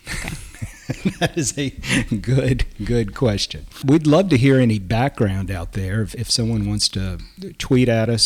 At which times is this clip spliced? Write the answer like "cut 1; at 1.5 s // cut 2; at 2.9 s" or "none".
none